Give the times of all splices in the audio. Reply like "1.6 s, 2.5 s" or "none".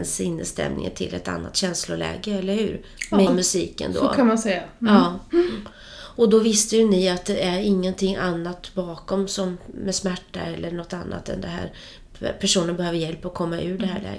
3.3 s